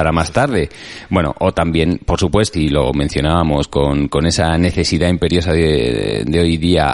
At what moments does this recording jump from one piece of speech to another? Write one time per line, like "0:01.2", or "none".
0:02.5